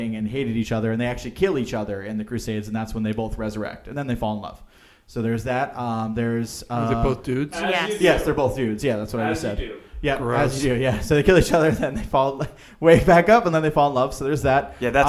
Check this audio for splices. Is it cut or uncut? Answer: uncut